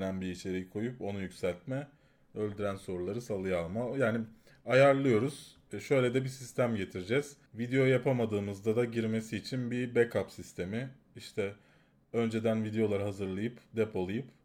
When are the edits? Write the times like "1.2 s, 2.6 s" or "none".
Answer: 7.5 s